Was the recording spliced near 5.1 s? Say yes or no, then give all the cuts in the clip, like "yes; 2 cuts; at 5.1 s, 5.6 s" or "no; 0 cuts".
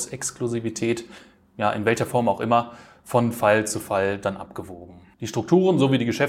yes; 1 cut; at 5.1 s